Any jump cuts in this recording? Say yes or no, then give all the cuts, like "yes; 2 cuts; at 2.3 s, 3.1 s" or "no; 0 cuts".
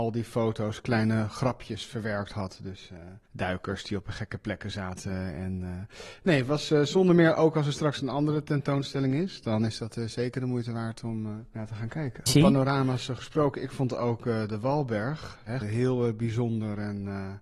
yes; 2 cuts; at 12.3 s, 15.6 s